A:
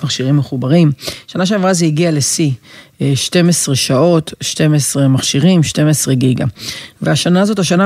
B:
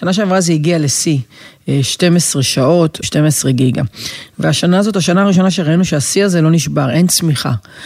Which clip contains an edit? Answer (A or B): B